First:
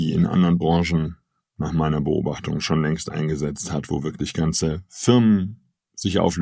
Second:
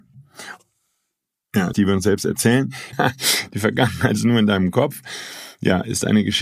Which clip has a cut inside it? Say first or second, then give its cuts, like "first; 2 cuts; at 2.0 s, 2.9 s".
second; 2 cuts; at 1.7 s, 2.9 s